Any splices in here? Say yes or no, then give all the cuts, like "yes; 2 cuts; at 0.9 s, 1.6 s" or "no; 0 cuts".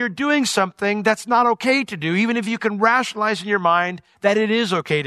no; 0 cuts